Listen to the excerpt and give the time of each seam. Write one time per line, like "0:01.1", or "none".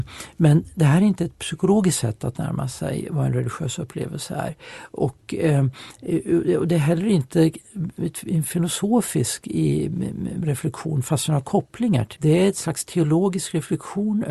0:12.2